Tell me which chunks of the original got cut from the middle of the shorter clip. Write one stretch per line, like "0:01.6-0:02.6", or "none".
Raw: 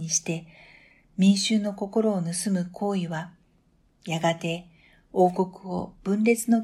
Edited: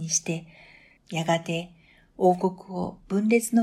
0:01.0-0:03.9